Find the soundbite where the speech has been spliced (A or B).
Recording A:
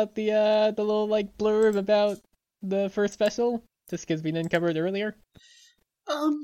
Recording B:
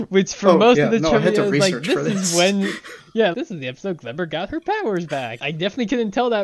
B